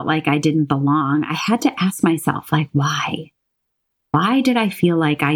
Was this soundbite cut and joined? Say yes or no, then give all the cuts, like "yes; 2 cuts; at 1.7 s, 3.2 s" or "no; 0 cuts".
no; 0 cuts